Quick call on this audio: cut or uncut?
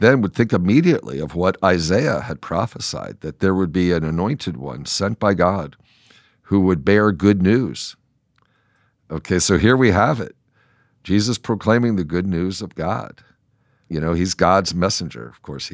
uncut